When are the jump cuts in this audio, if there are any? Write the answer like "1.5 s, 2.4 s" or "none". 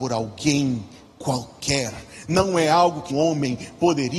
3.1 s